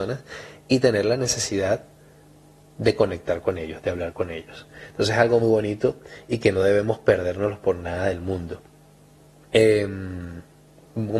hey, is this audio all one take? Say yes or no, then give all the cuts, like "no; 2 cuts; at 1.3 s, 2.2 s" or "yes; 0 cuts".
no; 1 cut; at 5.4 s